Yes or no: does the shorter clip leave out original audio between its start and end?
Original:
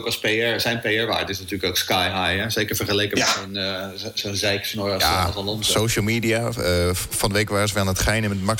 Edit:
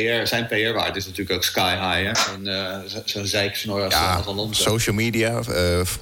yes